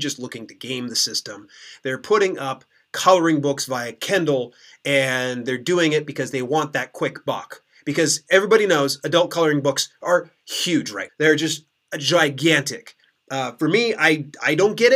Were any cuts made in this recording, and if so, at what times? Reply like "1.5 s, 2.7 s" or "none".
11.1 s